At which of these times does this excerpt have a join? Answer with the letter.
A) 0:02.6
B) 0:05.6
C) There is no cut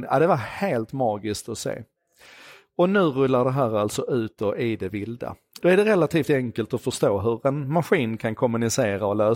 B